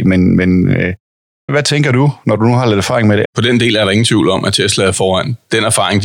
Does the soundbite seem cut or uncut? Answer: cut